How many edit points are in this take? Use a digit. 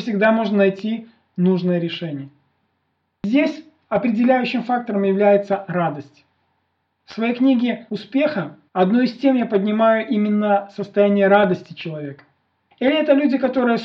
1